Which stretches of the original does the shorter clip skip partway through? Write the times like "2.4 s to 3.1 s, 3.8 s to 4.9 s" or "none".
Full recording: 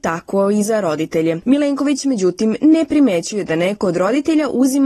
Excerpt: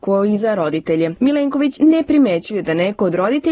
2.0 s to 2.6 s